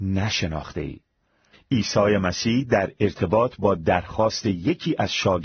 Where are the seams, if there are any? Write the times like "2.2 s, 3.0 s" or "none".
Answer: 1.5 s